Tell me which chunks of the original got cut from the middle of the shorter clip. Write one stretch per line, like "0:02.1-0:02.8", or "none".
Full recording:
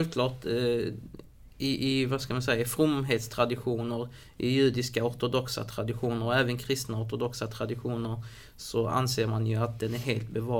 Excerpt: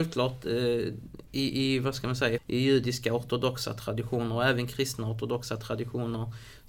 0:01.3-0:01.5
0:02.6-0:04.3